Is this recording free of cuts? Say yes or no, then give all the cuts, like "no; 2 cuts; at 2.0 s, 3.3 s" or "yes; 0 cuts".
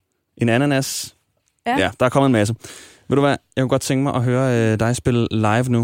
yes; 0 cuts